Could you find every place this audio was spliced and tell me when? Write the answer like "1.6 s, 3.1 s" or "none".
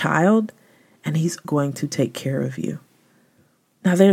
1.4 s